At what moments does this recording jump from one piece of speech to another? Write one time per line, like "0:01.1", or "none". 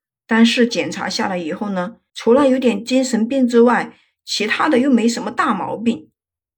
0:02.1